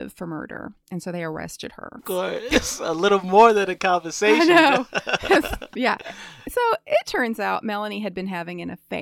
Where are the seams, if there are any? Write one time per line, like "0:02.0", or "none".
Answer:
0:02.0